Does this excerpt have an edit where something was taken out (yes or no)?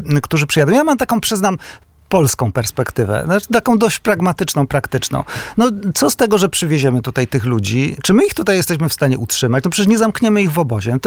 no